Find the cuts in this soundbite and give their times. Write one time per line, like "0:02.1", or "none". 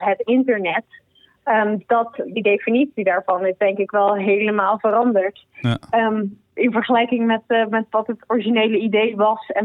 none